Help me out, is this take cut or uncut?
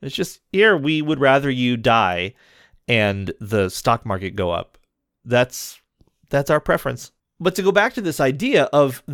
uncut